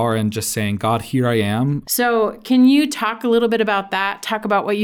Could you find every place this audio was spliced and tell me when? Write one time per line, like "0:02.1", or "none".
0:01.8

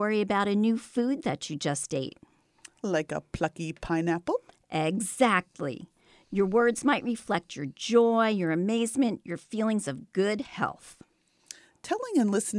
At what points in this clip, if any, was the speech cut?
none

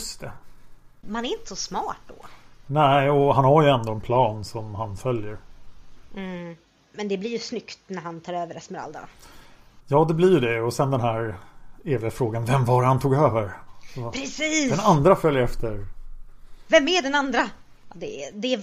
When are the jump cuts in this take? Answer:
0:01.0

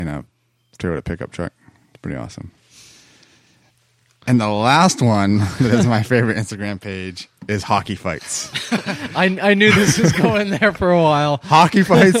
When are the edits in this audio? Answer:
none

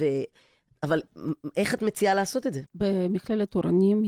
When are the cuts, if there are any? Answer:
0:02.7

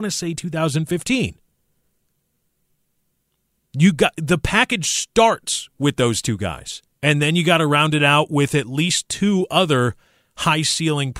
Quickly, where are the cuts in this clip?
0:06.9

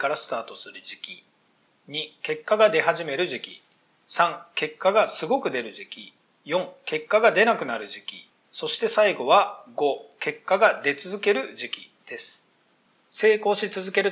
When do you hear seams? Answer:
none

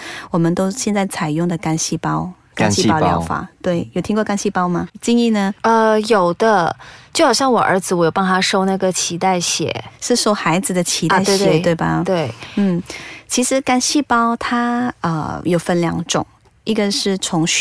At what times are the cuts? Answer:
0:04.9

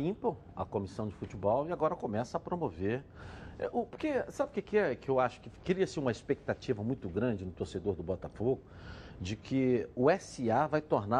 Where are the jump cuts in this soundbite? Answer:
none

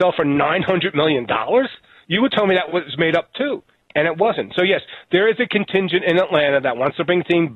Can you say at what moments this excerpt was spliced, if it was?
none

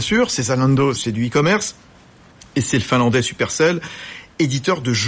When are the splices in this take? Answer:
0:01.0

